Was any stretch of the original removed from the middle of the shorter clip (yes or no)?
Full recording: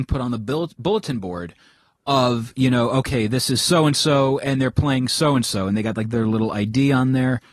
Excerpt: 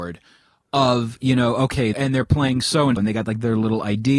yes